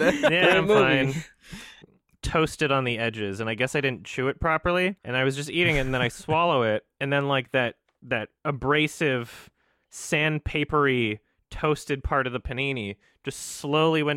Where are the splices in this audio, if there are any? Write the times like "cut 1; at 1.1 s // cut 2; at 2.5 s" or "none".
cut 1; at 1.8 s // cut 2; at 5.0 s